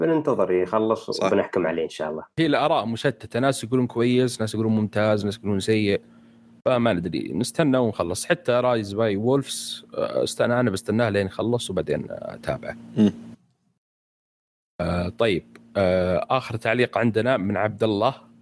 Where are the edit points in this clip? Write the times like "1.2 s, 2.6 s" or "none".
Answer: 2.3 s